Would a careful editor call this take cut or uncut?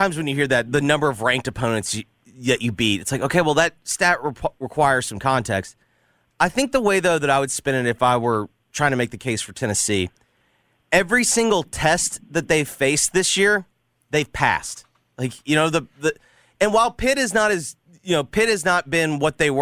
uncut